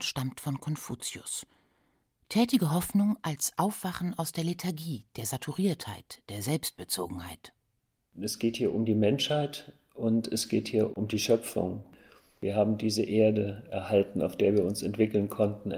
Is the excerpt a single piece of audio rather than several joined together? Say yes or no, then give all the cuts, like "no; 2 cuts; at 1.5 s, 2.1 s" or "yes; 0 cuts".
yes; 0 cuts